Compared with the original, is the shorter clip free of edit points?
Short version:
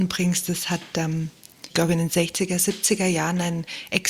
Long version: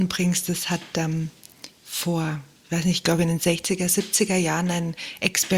no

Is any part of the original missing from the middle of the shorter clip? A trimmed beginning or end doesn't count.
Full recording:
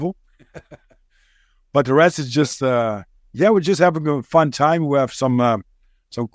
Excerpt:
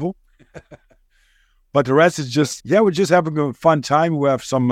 yes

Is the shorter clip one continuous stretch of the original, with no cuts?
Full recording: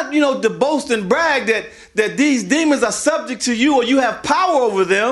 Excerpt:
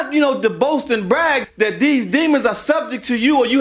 no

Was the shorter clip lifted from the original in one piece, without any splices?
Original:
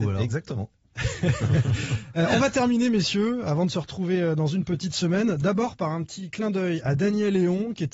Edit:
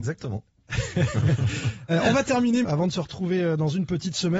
no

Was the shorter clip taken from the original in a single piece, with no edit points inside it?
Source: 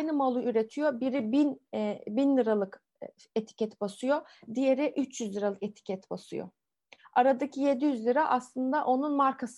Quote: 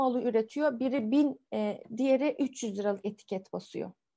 no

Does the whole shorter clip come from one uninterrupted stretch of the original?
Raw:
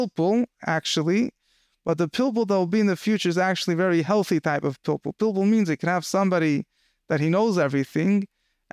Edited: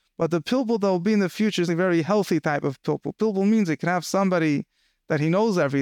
no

